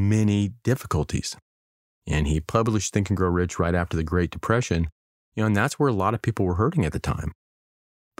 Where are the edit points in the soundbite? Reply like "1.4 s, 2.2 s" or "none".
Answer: 1.9 s